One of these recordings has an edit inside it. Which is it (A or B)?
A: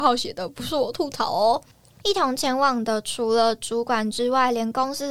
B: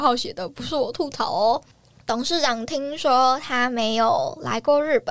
A